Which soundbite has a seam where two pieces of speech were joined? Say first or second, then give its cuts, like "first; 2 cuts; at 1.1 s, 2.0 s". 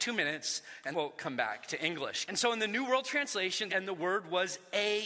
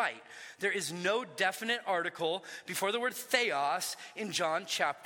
first; 3 cuts; at 0.9 s, 2.3 s, 3.7 s